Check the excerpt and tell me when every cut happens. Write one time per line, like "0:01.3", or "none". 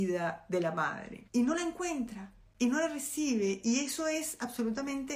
0:01.3